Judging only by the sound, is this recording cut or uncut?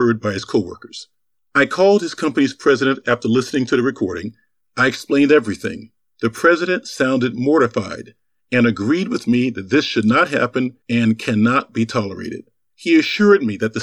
uncut